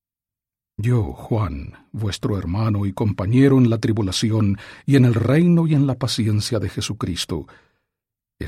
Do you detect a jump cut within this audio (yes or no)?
no